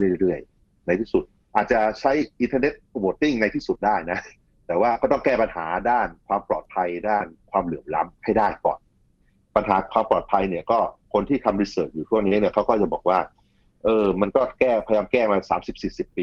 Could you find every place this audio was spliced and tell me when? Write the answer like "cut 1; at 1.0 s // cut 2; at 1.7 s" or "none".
none